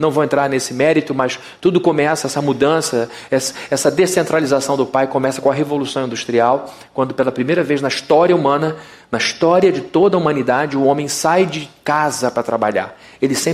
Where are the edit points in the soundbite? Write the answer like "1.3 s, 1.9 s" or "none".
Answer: none